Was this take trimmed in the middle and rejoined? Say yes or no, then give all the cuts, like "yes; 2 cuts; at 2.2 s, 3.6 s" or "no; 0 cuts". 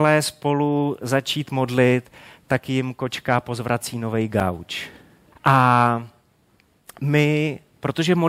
yes; 1 cut; at 5.3 s